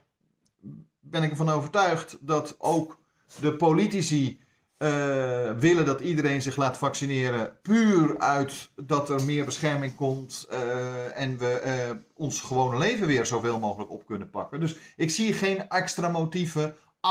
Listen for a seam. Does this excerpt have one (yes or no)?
no